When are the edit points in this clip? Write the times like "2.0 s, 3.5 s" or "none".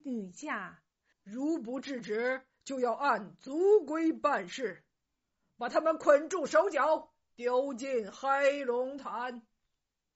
1.1 s